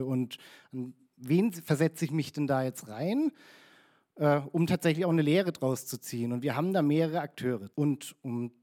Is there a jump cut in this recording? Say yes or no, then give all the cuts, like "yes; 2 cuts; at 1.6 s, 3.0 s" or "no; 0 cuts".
yes; 1 cut; at 7.7 s